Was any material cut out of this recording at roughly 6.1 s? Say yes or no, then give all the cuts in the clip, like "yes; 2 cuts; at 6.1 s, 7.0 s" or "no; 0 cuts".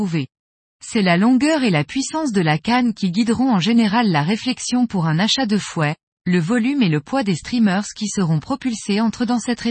yes; 1 cut; at 6.1 s